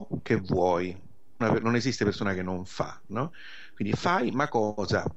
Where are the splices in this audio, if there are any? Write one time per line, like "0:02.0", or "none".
0:01.4

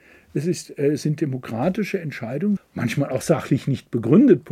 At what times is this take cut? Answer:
0:02.6

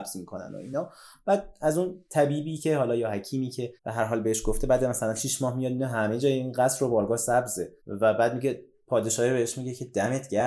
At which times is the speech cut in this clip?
0:03.8
0:07.8

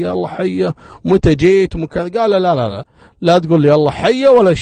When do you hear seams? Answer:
none

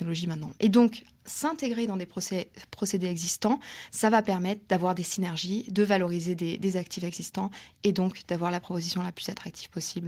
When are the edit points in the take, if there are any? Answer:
none

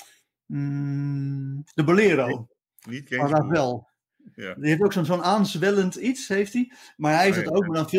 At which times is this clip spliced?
none

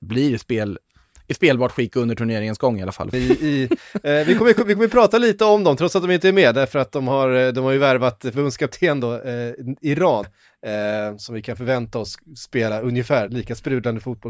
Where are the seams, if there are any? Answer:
0:03.1
0:10.2
0:13.3

